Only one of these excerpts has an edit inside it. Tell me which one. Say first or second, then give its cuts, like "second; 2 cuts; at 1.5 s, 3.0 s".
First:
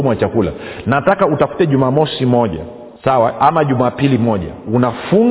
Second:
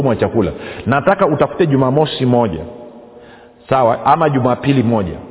first; 1 cut; at 3.0 s